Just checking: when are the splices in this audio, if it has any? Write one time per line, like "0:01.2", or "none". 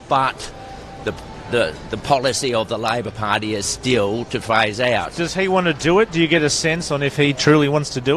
none